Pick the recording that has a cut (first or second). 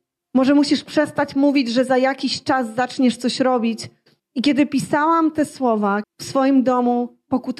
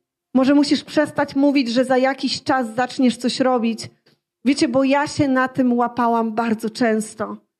first